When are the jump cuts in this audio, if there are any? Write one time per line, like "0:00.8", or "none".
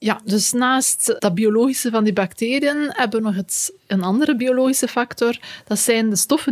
0:01.2